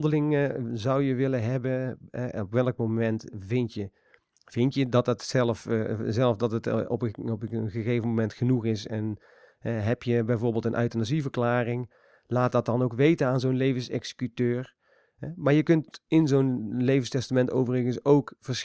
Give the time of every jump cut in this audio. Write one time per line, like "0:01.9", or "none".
none